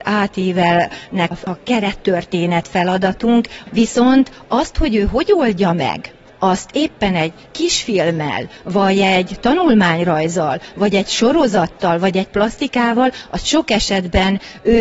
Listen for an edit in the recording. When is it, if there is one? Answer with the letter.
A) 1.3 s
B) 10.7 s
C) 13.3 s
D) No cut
A